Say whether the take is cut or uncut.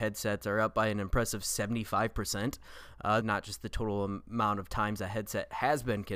cut